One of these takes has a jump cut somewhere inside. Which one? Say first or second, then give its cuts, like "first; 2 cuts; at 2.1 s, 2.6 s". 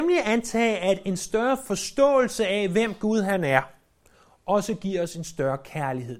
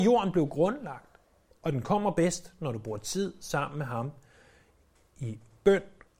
second; 1 cut; at 1.5 s